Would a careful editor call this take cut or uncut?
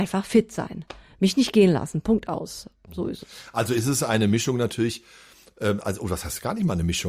uncut